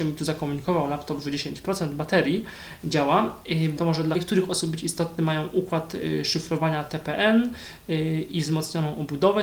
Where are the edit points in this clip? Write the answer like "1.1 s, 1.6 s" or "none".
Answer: 3.8 s